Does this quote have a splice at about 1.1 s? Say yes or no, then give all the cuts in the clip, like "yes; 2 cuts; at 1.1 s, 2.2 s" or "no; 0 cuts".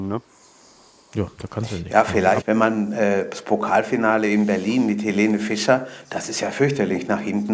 no; 2 cuts; at 2.4 s, 6.0 s